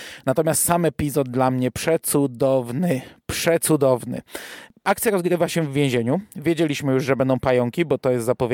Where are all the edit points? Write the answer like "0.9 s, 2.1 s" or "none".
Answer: none